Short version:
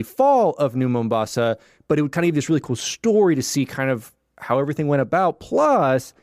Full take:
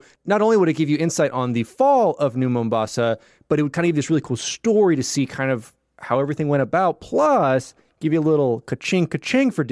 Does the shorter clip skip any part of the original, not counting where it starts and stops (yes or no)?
no